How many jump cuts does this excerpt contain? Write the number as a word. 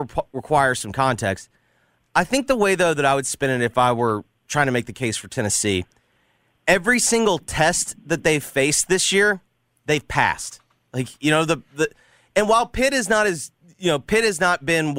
zero